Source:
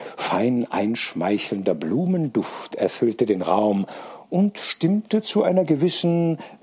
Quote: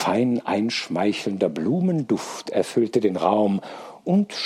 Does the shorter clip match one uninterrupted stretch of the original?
yes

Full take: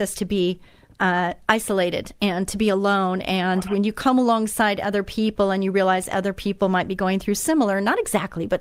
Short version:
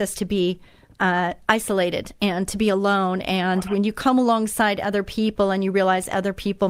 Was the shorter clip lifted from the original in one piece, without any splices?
yes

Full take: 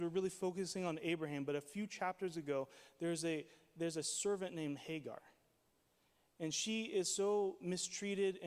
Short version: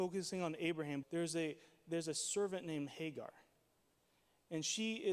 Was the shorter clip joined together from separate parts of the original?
yes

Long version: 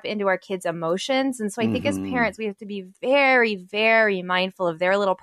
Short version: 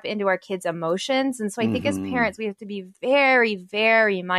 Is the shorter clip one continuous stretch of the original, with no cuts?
yes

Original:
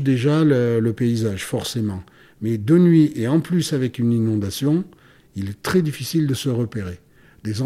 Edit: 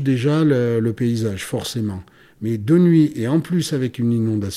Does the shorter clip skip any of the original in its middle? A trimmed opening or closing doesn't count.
no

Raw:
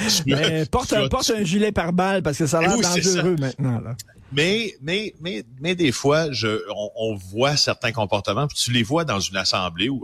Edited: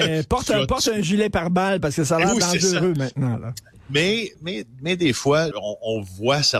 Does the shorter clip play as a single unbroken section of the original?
no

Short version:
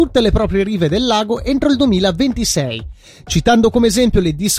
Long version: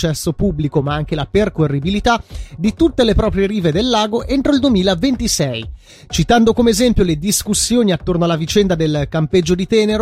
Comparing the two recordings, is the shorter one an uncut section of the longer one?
yes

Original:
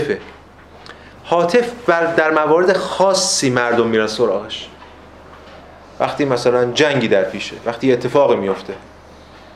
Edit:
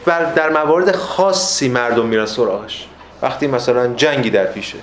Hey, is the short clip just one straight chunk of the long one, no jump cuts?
no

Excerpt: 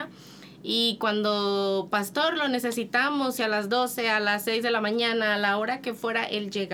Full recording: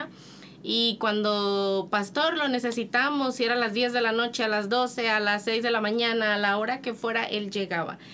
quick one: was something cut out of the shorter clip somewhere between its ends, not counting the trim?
yes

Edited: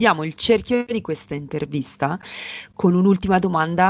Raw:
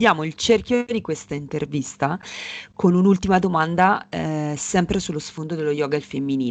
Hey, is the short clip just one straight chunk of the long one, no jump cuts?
yes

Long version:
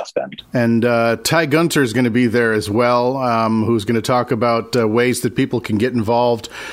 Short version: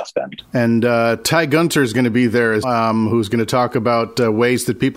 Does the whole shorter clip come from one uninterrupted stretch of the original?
no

